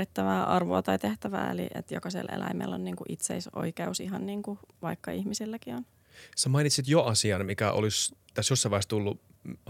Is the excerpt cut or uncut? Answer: uncut